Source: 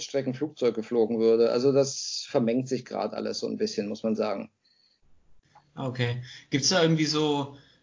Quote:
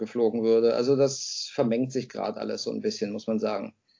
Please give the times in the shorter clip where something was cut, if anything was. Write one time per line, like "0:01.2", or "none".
none